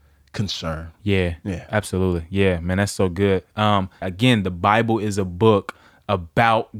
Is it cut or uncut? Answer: cut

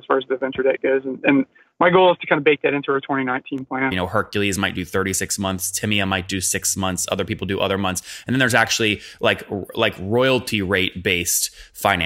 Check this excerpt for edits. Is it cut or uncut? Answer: cut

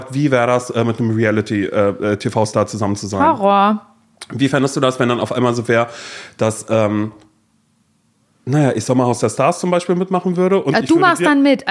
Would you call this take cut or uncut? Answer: uncut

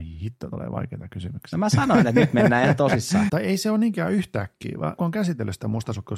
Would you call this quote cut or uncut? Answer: cut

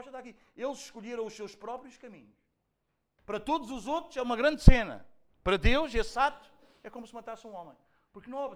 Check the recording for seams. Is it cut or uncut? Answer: cut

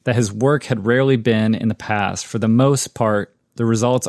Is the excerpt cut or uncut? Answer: uncut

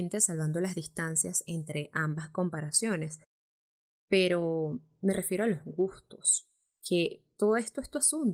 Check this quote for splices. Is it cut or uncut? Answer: uncut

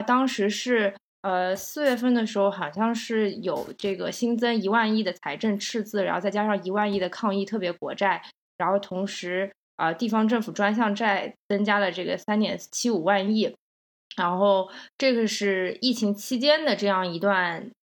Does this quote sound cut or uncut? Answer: uncut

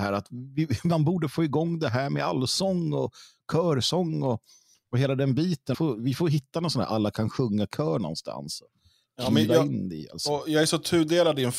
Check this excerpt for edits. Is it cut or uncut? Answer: cut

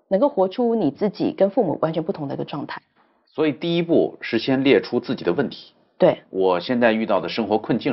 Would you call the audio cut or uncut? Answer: uncut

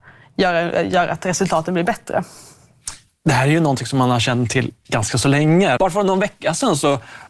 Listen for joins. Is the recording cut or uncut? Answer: cut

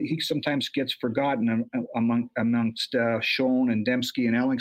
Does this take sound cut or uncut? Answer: uncut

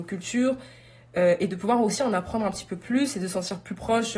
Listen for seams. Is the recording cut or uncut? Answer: uncut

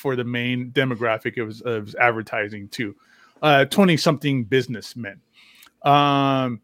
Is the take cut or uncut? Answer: uncut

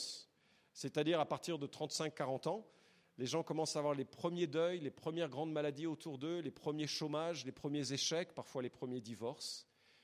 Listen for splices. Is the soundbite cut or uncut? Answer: uncut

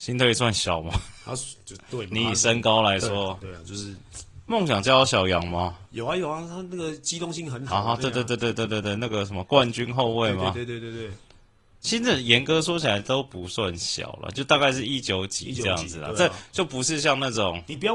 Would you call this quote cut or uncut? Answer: uncut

